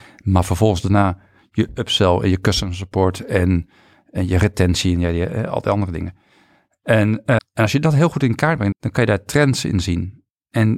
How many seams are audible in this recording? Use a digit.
2